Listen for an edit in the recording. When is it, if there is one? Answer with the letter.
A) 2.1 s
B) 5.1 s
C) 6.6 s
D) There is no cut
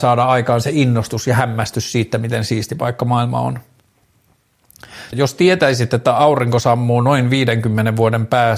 B